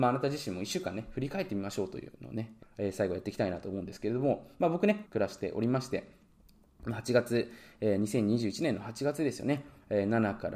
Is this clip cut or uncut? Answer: cut